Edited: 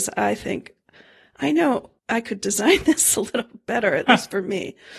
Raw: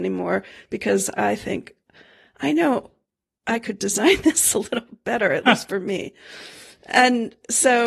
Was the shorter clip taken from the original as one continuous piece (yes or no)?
no